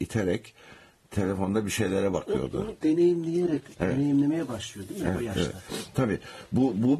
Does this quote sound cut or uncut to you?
uncut